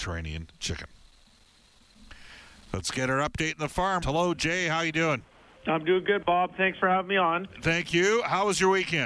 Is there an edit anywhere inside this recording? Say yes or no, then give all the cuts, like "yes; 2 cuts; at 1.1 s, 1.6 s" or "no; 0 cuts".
yes; 1 cut; at 4.0 s